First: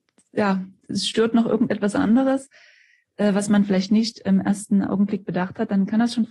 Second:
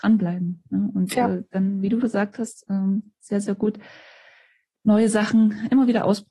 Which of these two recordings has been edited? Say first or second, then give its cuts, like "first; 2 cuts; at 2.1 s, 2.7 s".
second; 1 cut; at 2.0 s